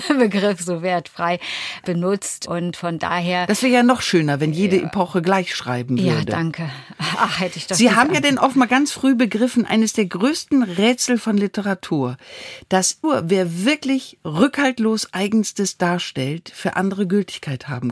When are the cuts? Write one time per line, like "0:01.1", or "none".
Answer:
0:13.0

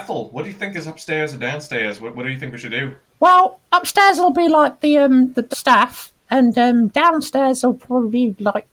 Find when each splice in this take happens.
0:05.5

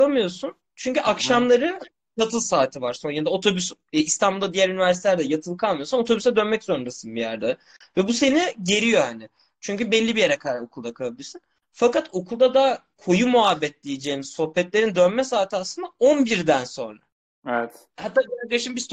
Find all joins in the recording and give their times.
none

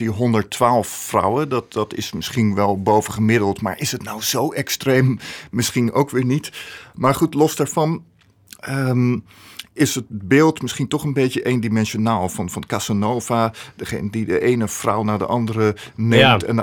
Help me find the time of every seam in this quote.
none

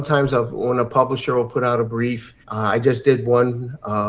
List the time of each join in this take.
0:02.4

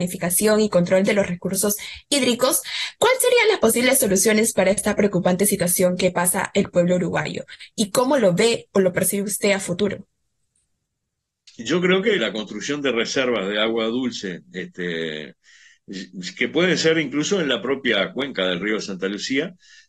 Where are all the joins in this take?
0:12.2

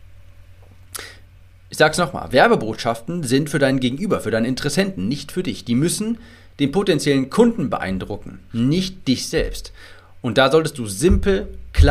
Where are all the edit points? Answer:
none

